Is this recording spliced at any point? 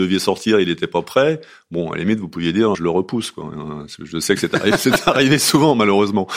yes; 1 cut; at 2.7 s

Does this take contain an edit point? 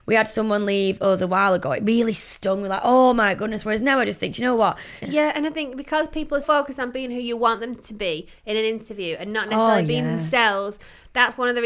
yes; 2 cuts; at 5.0 s, 6.4 s

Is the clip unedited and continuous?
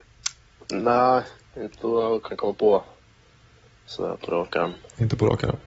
yes; 0 cuts

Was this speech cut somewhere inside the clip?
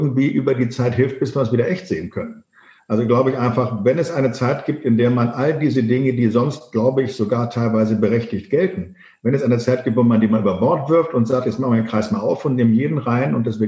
no; 0 cuts

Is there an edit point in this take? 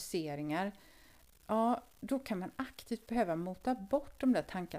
no; 0 cuts

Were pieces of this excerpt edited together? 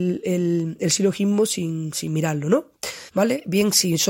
yes; 1 cut; at 3.1 s

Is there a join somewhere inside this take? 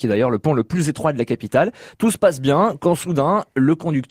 no; 0 cuts

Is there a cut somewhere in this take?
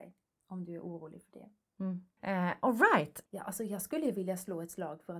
yes; 2 cuts; at 2.2 s, 3.3 s

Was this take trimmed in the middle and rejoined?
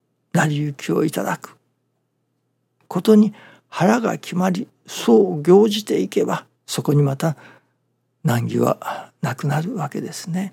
yes; 1 cut; at 6.5 s

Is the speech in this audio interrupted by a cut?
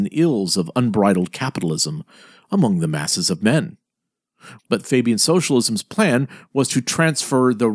yes; 1 cut; at 4.6 s

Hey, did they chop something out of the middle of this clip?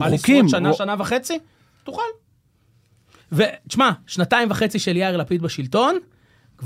no; 0 cuts

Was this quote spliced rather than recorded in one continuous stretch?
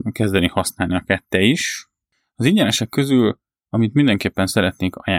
no; 0 cuts

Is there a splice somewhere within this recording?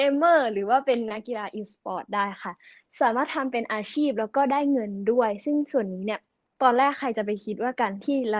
no; 0 cuts

